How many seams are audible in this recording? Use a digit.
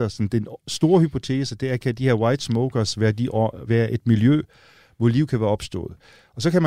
1